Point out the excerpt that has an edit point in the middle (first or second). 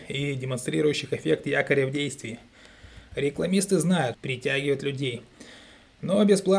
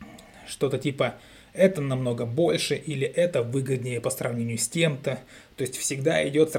first